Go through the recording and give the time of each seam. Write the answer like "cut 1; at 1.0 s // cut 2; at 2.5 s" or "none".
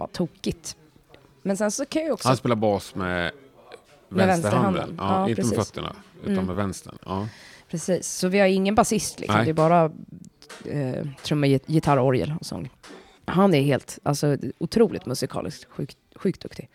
none